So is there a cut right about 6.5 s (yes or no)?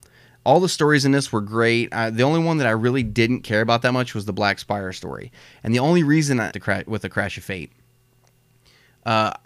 yes